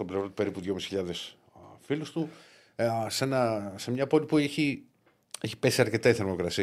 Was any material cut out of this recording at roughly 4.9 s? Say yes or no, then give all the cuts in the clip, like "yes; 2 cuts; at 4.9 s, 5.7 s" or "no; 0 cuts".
no; 0 cuts